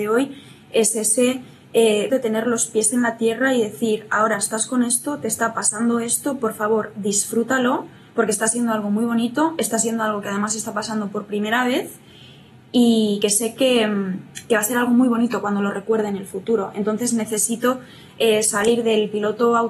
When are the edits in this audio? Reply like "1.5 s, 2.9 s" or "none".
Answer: 2.1 s